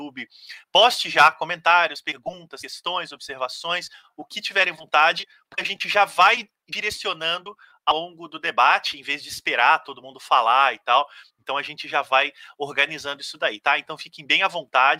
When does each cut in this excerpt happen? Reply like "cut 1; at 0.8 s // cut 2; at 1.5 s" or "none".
none